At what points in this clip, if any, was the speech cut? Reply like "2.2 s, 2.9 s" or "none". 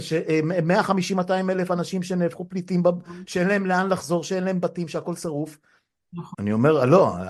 6.3 s